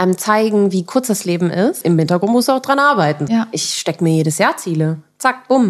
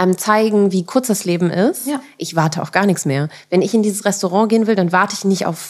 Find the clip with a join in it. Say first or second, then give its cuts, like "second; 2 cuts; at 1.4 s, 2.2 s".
first; 2 cuts; at 1.8 s, 3.3 s